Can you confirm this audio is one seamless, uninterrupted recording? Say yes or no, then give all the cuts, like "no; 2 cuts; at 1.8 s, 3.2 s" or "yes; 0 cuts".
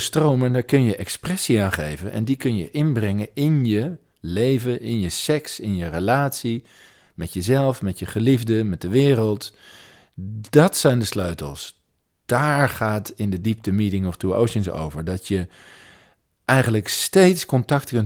yes; 0 cuts